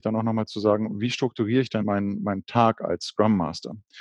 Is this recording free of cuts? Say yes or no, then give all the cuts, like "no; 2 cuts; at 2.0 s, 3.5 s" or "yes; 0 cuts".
no; 1 cut; at 1.8 s